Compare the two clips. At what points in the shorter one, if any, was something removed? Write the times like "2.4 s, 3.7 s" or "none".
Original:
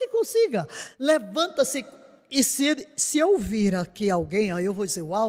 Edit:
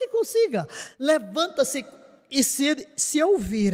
none